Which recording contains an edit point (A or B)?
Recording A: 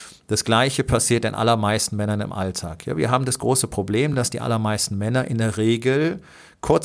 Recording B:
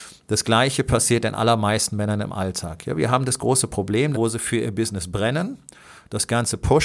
B